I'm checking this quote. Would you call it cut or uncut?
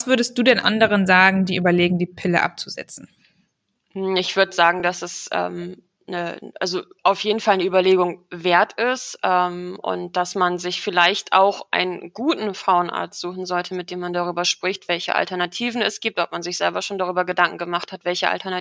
uncut